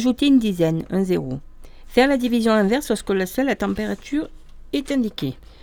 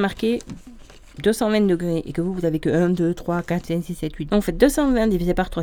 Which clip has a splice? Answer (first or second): second